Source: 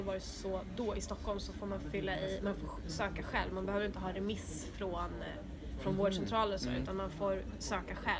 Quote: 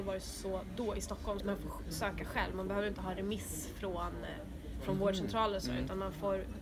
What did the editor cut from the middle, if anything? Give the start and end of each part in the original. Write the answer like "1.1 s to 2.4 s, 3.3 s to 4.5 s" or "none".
1.4 s to 2.4 s